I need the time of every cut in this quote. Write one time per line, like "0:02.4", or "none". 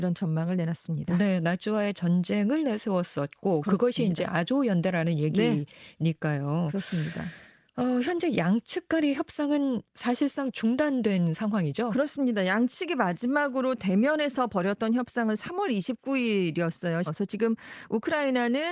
0:17.1